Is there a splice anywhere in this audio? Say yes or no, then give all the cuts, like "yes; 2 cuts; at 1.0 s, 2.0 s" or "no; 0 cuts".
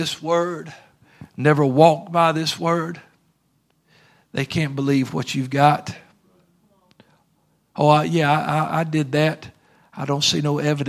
no; 0 cuts